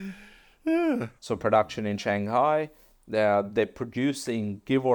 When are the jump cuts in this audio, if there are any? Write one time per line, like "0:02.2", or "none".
0:01.2